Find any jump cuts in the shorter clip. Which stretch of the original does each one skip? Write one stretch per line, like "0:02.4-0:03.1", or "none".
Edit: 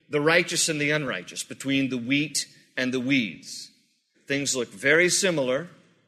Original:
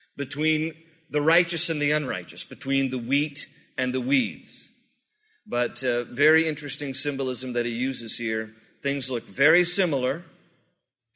0:05.1-0:08.7